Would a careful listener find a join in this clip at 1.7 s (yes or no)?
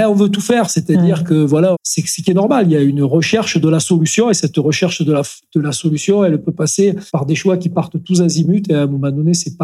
yes